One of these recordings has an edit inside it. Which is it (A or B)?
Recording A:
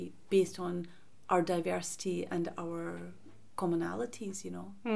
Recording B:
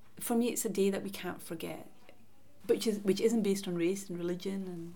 B